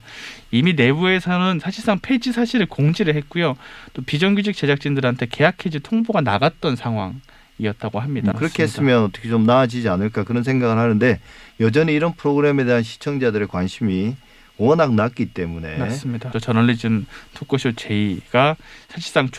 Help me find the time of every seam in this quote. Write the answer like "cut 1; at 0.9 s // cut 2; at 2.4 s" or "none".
cut 1; at 8.3 s // cut 2; at 16.3 s